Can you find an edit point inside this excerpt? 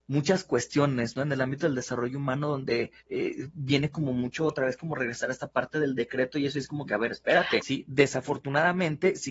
yes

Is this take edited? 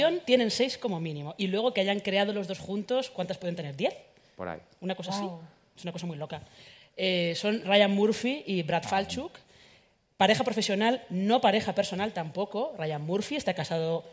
no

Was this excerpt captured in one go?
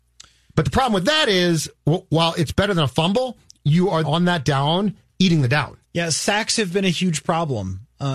no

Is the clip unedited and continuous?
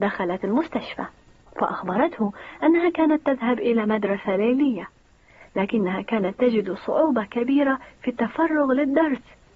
no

